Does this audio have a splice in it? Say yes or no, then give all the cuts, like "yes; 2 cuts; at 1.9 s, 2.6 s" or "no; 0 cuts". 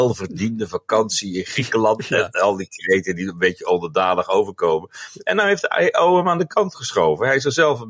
no; 0 cuts